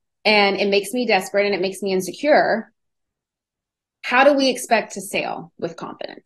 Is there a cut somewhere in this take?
no; 0 cuts

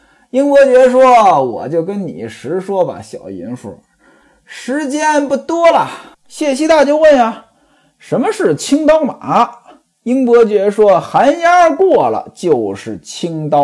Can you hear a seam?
yes; 1 cut; at 6.1 s

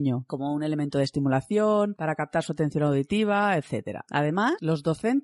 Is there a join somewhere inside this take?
no; 0 cuts

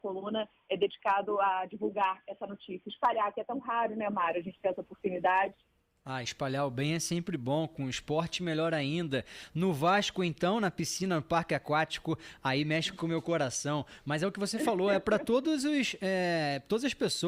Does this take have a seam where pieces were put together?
no; 0 cuts

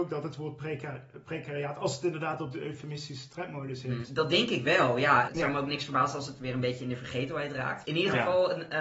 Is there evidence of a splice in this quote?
yes; 3 cuts; at 4.0 s, 5.3 s, 7.8 s

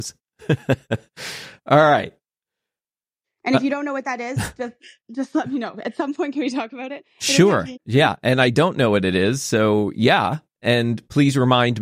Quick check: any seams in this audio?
yes; 2 cuts; at 3.2 s, 7.7 s

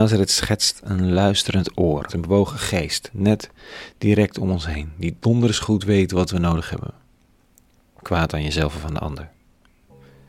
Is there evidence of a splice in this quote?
yes; 2 cuts; at 2.1 s, 8.0 s

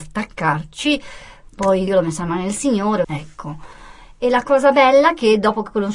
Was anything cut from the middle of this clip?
yes; 2 cuts; at 1.9 s, 3.0 s

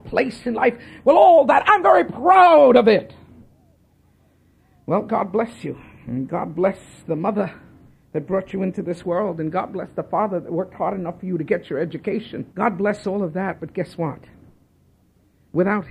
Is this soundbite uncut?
no; 1 cut; at 12.5 s

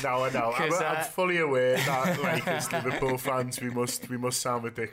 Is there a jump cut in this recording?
no; 0 cuts

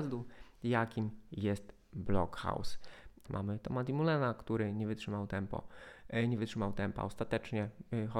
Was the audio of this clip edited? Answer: yes; 1 cut; at 3.2 s

